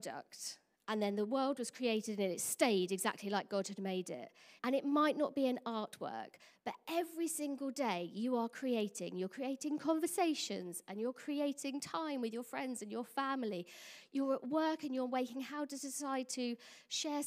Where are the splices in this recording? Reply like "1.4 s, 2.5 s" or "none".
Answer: 4.6 s